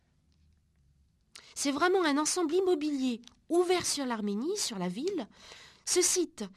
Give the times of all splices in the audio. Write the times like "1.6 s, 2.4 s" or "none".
1.5 s